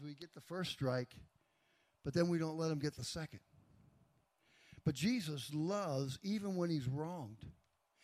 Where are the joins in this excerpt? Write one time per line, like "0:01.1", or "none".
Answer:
none